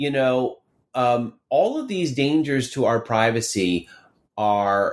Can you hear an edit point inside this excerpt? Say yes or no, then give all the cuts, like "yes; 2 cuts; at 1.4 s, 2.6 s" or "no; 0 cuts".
no; 0 cuts